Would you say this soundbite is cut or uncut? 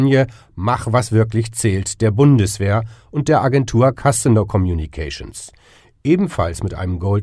uncut